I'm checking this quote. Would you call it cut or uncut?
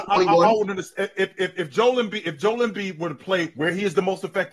uncut